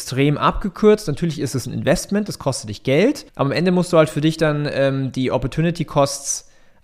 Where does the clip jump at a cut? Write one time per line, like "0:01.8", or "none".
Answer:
0:03.3